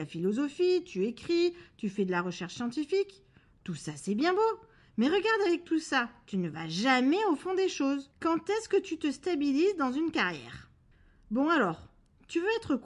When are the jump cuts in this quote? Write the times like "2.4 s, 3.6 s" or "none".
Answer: 8.1 s

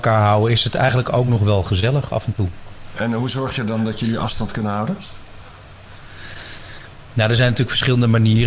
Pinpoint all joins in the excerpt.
none

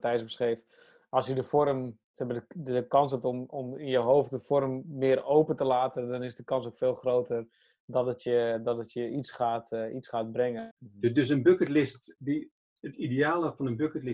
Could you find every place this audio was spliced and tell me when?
none

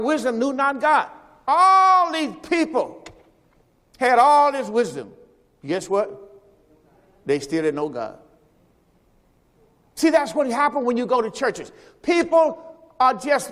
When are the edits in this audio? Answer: none

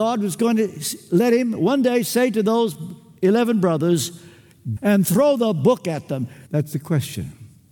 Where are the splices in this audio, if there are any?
4.8 s, 6.5 s

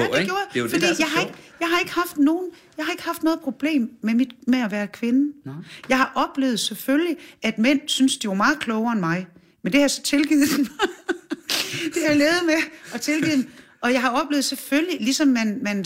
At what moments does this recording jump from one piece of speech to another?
none

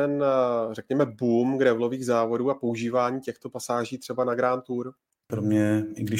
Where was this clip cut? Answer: 5.3 s

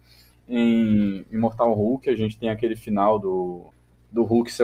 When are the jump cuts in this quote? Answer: none

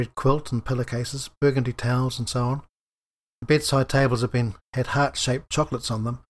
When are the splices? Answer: none

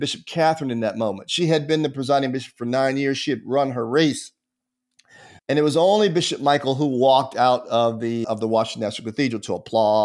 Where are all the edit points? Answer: 5.4 s, 8.2 s

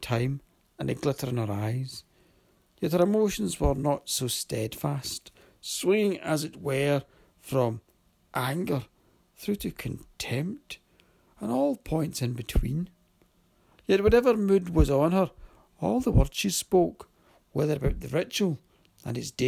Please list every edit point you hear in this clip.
none

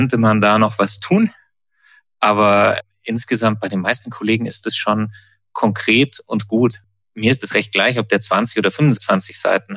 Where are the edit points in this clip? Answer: none

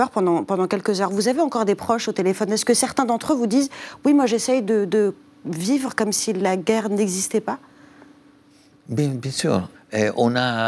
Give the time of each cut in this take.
9.7 s

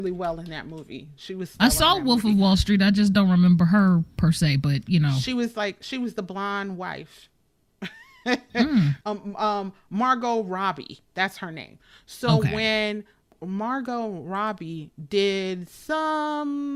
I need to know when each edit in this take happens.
none

